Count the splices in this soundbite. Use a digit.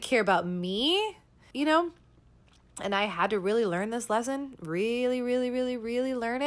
1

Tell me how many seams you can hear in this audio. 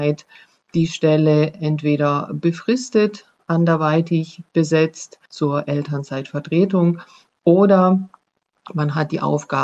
1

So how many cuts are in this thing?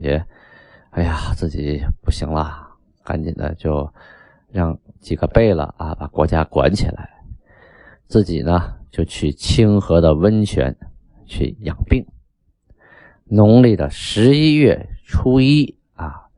0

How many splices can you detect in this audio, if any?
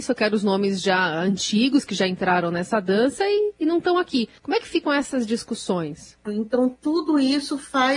2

